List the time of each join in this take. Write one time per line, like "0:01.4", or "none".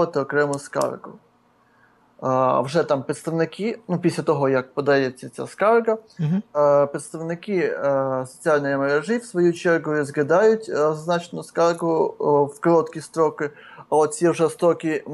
none